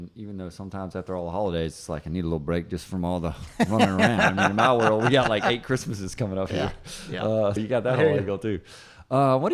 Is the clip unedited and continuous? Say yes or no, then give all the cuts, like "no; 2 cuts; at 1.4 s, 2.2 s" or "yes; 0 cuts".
no; 1 cut; at 7.6 s